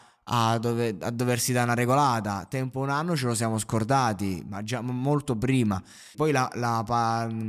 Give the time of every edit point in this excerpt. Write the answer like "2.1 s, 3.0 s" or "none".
6.1 s